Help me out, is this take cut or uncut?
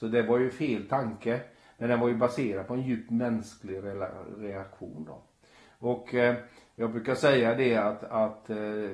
uncut